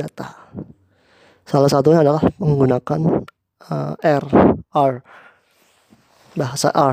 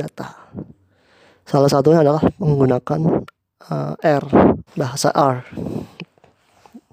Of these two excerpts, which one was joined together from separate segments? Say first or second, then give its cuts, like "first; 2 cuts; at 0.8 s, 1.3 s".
second; 1 cut; at 4.7 s